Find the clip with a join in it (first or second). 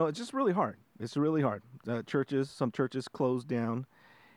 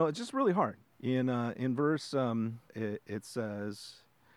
second